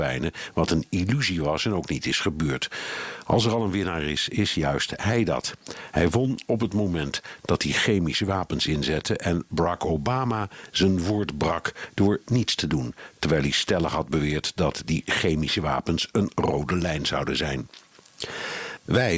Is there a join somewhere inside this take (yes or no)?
no